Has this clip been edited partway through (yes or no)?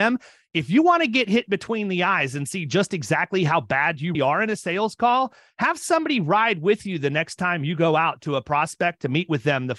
yes